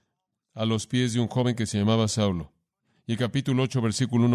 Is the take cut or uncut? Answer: uncut